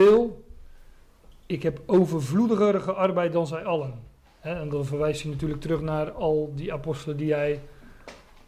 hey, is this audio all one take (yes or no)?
yes